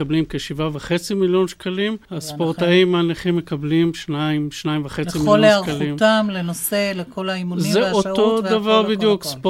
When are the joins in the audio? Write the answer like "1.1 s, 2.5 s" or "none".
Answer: 2.0 s